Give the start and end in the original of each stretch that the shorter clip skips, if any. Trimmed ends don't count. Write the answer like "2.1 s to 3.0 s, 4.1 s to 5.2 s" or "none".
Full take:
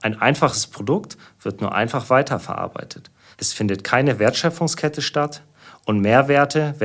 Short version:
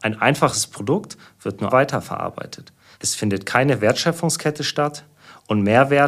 1.7 s to 2.1 s